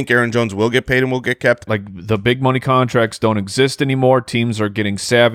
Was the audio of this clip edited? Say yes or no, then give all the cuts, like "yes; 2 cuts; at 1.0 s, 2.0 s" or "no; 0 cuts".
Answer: yes; 1 cut; at 1.7 s